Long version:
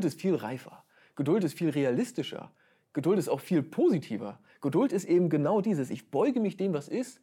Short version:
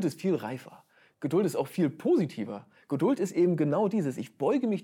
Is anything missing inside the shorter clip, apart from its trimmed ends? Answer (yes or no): yes